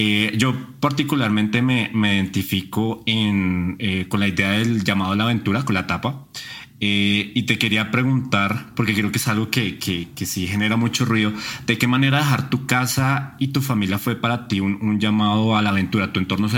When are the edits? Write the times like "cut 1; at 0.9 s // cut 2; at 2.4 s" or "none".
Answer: none